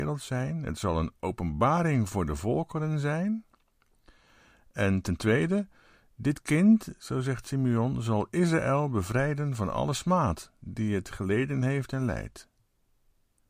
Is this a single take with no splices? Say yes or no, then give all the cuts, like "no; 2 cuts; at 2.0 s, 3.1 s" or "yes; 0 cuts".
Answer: yes; 0 cuts